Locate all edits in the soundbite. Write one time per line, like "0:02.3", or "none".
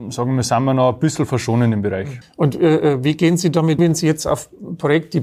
0:02.2
0:03.8